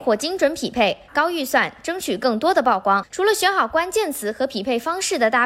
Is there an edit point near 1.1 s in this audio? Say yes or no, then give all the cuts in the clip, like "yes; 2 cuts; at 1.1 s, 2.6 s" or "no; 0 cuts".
yes; 2 cuts; at 1.1 s, 3.1 s